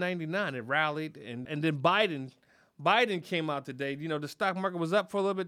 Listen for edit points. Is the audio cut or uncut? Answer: cut